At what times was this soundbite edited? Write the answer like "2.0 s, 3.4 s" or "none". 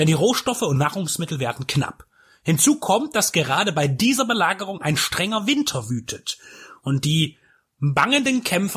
none